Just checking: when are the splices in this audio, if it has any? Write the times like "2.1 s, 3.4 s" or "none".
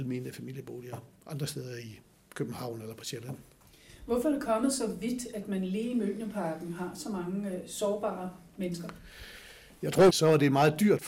10.1 s